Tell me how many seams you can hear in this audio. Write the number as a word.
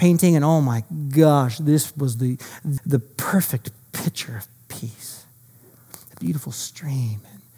one